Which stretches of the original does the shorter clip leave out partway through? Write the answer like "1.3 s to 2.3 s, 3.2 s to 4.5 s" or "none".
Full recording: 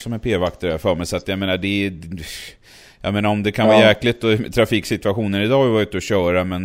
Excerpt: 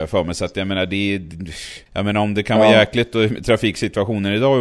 2.6 s to 2.9 s